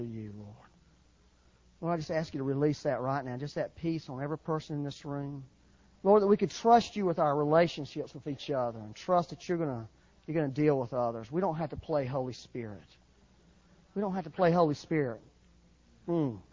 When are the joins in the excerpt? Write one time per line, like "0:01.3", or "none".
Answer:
0:06.0